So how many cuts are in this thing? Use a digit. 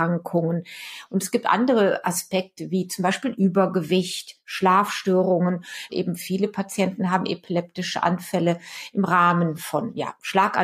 1